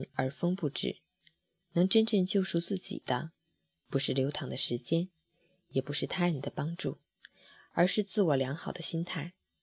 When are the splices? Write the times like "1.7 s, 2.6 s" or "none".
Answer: none